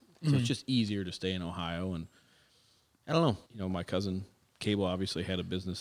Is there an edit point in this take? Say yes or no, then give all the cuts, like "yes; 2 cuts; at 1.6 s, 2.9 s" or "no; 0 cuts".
yes; 1 cut; at 3.5 s